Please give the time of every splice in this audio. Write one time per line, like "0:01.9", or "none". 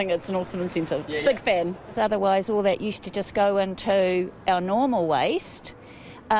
0:01.0